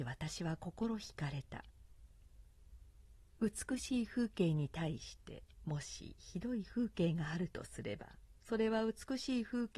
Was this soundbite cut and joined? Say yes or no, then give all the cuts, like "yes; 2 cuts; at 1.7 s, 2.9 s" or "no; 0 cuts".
yes; 1 cut; at 8.4 s